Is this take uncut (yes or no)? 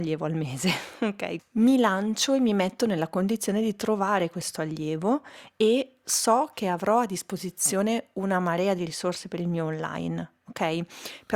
no